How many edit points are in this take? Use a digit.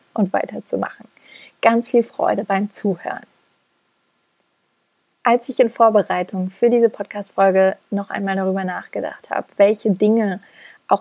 0